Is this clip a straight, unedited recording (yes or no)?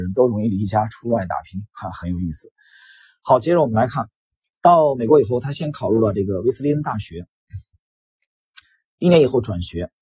yes